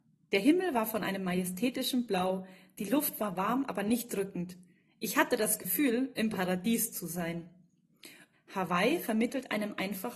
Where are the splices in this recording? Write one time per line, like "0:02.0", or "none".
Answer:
0:08.3